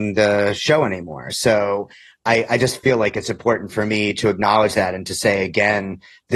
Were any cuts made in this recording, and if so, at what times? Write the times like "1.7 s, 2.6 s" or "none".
none